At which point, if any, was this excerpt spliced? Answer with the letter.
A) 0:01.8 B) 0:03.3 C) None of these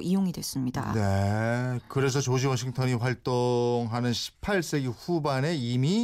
C